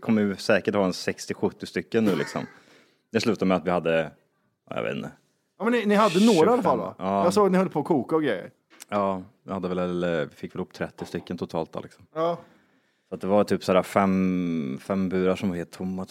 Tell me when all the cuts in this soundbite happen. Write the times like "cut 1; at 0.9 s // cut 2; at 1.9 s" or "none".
none